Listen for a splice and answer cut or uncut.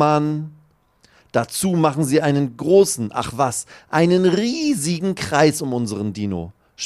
uncut